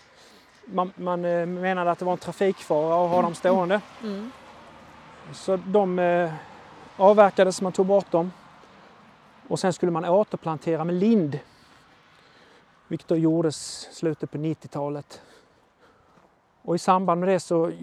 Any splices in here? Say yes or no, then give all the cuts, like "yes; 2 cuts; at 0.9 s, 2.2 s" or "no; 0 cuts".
no; 0 cuts